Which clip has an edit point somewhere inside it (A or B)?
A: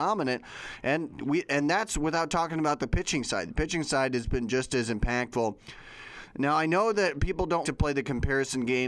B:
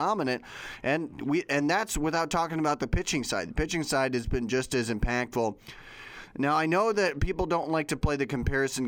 A